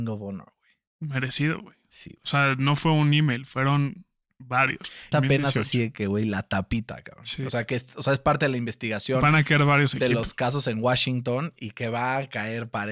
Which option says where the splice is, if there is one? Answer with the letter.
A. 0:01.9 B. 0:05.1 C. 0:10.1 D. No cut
B